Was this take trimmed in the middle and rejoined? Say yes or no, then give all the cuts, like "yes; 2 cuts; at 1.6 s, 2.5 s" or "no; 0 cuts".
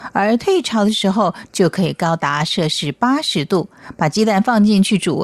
no; 0 cuts